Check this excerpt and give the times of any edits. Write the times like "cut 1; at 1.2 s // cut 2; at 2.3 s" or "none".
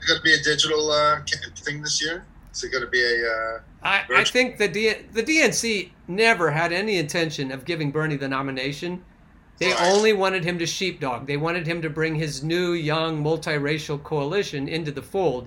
cut 1; at 1.6 s